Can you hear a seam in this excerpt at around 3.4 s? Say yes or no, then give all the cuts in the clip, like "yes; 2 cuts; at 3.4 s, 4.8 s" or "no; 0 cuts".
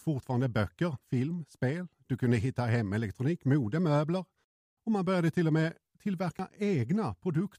no; 1 cut; at 1.0 s